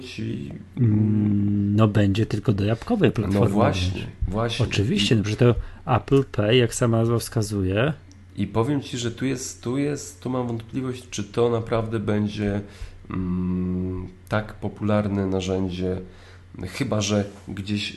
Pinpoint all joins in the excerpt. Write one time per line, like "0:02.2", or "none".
none